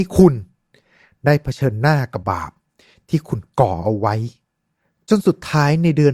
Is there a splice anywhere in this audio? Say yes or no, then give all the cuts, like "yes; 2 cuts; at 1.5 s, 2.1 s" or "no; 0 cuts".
yes; 1 cut; at 2.2 s